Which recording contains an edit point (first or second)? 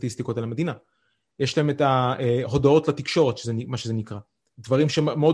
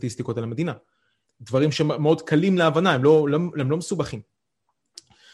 second